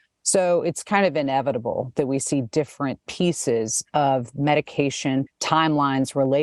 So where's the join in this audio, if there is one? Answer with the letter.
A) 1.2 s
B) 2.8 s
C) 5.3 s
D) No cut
C